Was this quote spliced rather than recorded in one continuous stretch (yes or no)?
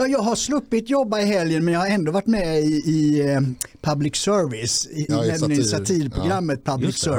yes